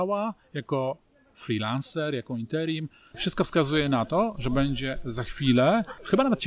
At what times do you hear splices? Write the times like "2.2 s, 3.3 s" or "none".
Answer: 3.1 s